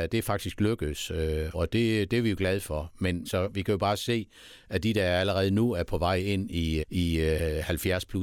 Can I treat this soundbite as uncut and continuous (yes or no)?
no